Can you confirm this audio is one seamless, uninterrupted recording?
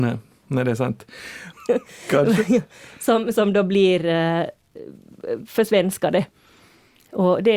no; 1 cut; at 1.5 s

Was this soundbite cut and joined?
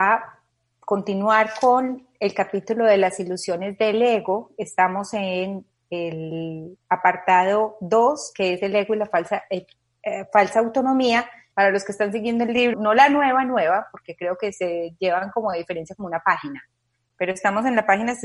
yes; 2 cuts; at 11.5 s, 12.7 s

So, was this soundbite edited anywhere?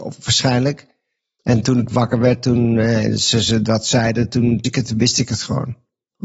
yes; 1 cut; at 4.6 s

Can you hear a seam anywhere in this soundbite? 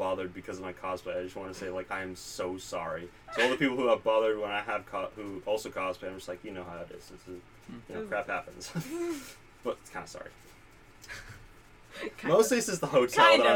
no; 0 cuts

